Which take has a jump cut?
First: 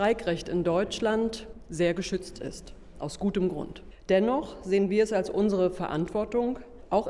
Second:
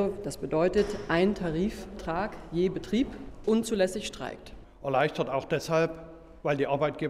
second; 2 cuts; at 3.4 s, 4.6 s

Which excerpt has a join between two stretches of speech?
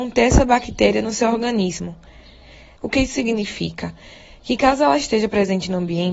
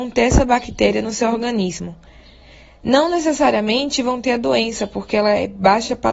first; 1 cut; at 2.8 s

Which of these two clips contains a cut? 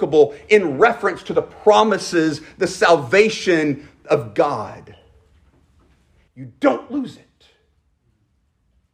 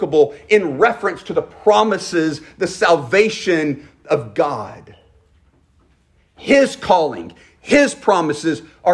first; 1 cut; at 6.3 s

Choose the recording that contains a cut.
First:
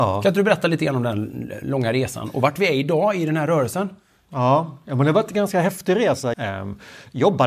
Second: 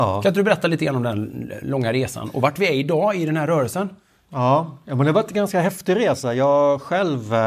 first; 1 cut; at 6.3 s

